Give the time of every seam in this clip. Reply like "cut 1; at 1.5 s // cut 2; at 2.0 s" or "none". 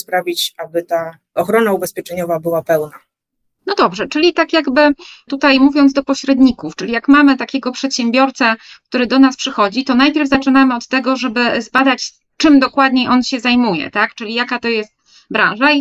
none